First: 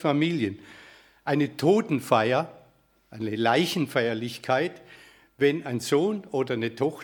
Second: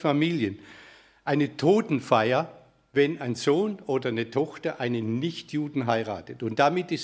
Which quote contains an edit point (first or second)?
second